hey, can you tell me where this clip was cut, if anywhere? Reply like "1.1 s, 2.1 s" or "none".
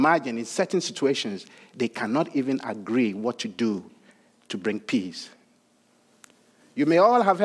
none